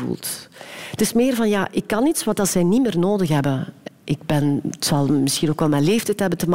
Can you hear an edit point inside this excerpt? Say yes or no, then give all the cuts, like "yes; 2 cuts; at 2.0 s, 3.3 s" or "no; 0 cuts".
no; 0 cuts